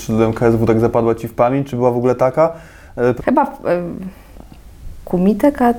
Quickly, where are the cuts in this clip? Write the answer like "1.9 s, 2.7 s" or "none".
3.2 s